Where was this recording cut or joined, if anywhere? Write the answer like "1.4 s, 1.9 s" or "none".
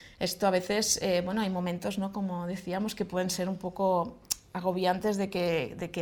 none

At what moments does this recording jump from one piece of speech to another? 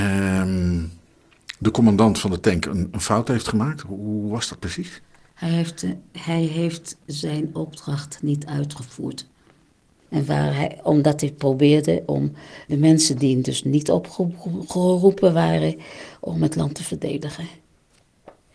10.1 s, 12.7 s

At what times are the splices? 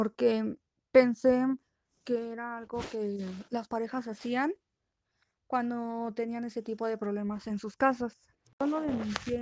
8.4 s

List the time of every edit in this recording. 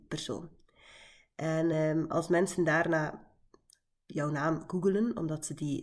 none

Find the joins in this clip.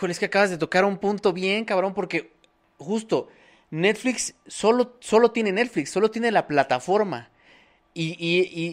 none

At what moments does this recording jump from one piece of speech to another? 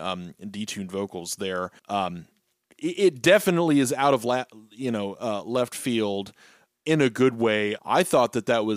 1.8 s, 7.8 s

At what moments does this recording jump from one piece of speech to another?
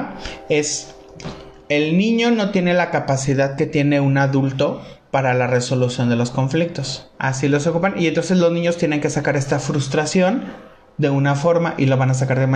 7.1 s

